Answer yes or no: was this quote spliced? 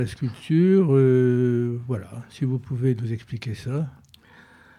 no